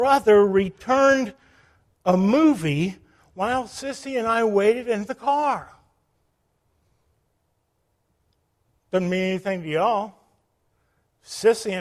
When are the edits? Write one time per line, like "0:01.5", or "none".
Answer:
none